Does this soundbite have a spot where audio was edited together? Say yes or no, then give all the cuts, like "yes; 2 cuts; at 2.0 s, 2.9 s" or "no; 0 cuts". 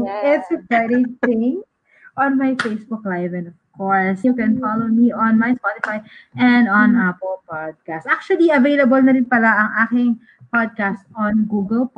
yes; 1 cut; at 4.2 s